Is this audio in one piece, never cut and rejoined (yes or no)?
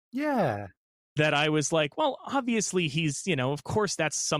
yes